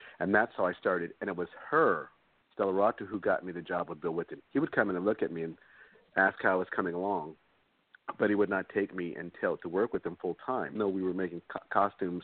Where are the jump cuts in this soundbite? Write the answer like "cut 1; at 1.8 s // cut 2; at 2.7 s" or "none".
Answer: cut 1; at 10.8 s